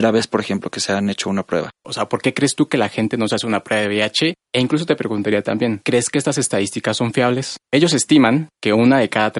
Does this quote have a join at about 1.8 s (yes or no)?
yes